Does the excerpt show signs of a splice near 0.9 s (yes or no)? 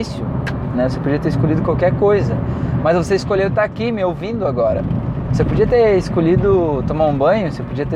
no